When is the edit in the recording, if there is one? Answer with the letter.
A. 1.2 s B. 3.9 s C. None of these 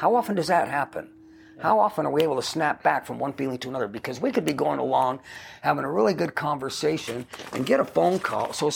C